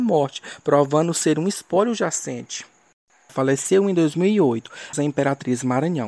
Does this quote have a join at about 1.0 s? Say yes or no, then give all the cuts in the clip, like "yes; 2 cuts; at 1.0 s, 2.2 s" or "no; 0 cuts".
no; 2 cuts; at 3.3 s, 4.9 s